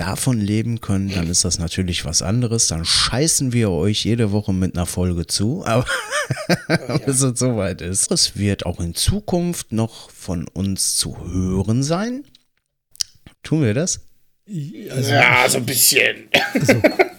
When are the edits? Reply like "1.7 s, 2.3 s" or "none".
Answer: 8.1 s, 13.3 s